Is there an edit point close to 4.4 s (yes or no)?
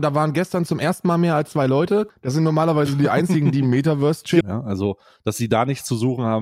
yes